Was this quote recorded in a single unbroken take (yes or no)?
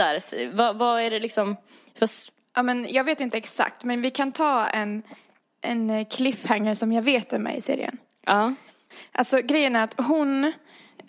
yes